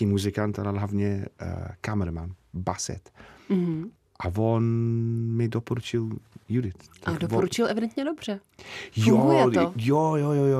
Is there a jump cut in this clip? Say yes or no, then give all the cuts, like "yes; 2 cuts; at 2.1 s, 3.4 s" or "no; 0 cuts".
no; 0 cuts